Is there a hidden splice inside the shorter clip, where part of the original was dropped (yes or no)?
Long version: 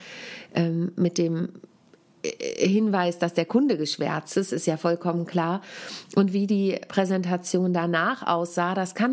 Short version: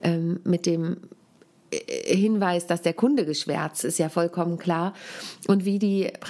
yes